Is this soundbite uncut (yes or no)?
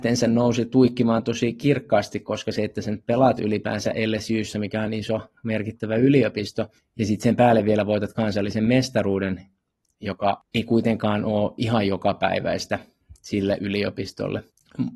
yes